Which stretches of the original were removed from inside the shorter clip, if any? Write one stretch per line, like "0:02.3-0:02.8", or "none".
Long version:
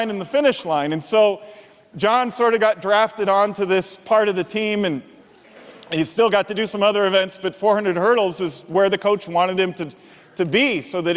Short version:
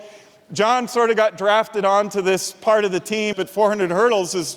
0:04.8-0:07.4

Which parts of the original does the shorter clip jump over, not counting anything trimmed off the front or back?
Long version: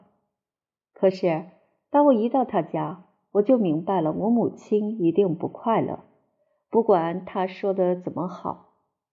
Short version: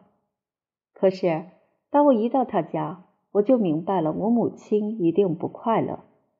none

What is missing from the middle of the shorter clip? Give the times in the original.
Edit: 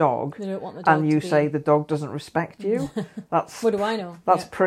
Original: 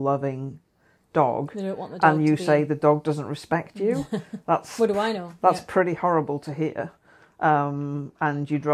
none

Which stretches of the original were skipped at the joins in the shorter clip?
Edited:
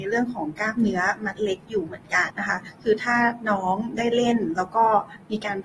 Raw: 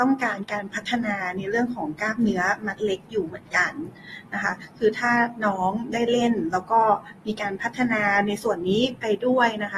0:03.7-0:04.3

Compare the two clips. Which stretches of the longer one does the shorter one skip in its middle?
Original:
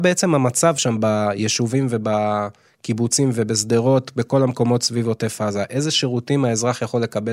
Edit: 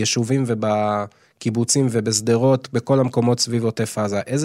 none

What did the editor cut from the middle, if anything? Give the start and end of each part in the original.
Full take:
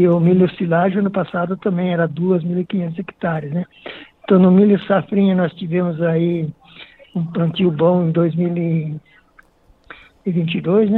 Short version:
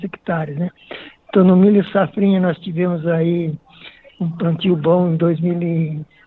none

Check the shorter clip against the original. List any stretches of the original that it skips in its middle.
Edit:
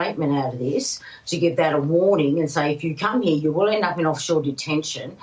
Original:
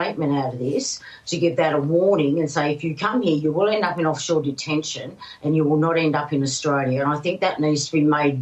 none

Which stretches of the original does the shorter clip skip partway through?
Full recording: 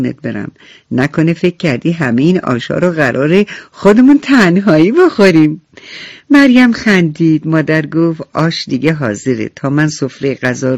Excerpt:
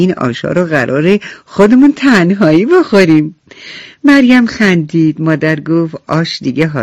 none

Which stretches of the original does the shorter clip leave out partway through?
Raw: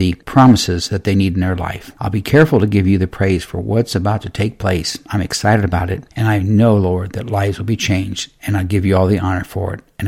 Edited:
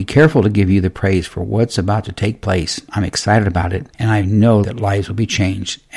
0:06.8-0:07.1

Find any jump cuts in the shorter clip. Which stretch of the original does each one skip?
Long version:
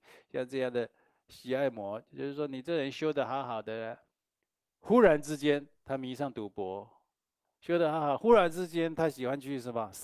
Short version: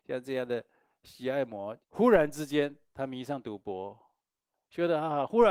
0:02.1-0:04.7

